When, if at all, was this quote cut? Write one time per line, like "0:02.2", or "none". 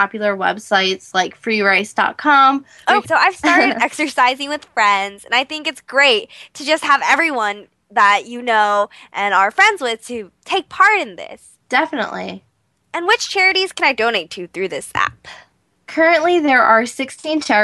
0:03.0
0:11.6